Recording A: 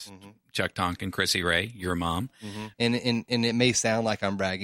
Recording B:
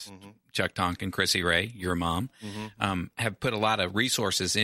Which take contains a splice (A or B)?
A